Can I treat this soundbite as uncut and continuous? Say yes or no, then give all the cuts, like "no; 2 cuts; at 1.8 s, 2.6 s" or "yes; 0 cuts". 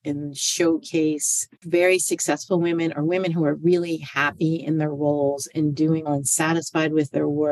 no; 2 cuts; at 1.6 s, 6.1 s